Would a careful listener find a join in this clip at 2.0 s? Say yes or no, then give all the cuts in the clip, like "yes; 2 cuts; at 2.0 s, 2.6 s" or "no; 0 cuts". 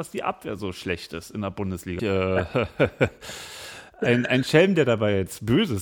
yes; 1 cut; at 2.0 s